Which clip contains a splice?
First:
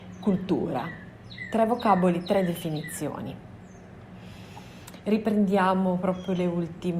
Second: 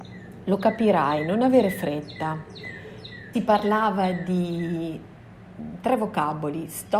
second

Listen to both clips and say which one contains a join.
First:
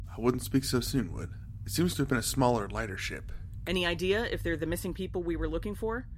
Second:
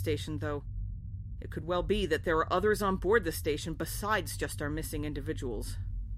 first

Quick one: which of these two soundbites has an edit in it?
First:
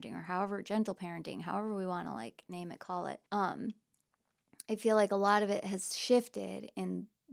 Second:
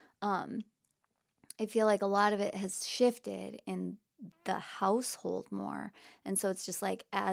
first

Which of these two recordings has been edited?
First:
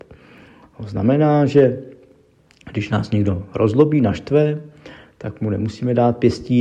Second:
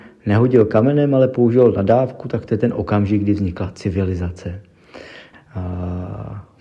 second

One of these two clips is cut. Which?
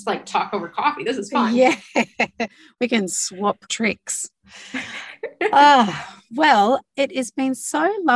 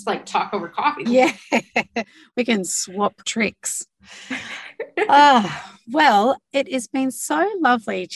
second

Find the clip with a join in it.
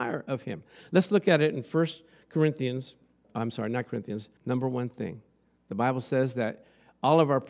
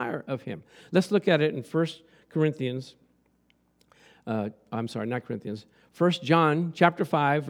first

